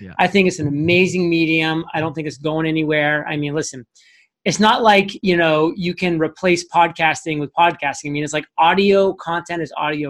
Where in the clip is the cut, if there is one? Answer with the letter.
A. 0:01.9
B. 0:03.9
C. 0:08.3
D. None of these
D